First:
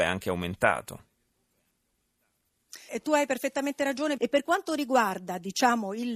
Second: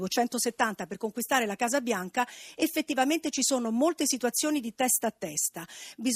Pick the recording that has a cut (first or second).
first